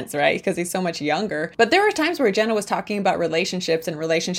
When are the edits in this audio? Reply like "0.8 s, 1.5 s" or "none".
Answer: none